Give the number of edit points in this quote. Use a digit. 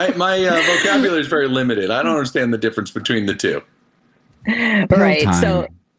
0